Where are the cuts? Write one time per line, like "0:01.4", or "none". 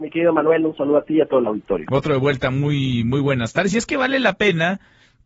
none